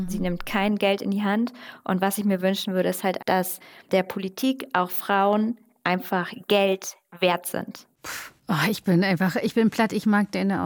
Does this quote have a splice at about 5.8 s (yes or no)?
no